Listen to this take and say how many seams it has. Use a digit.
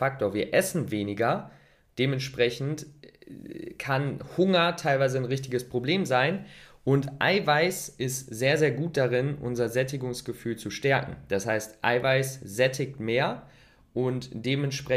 0